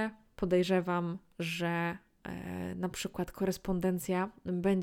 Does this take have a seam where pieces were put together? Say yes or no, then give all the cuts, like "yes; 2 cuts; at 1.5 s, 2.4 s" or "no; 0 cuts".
no; 0 cuts